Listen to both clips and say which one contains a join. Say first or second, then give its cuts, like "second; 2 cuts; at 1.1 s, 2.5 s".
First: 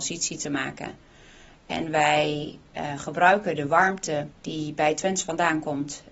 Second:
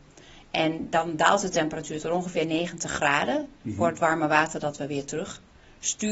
first; 1 cut; at 4.3 s